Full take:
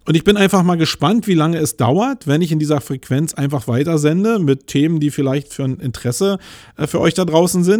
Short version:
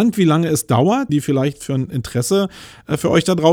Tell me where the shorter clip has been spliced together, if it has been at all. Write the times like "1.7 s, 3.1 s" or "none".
1.1 s